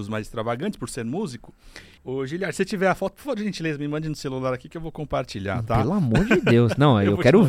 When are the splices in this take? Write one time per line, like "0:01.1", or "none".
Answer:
0:02.0